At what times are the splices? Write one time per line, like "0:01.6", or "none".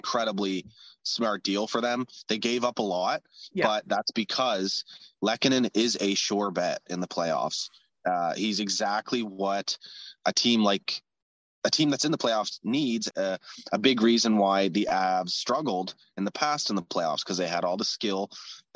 0:13.1